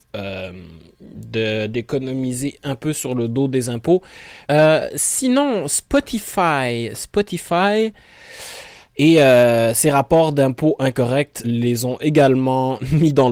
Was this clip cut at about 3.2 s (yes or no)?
no